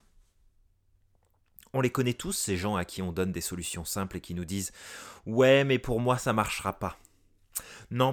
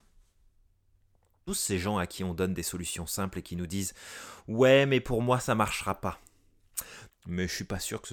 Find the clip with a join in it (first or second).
second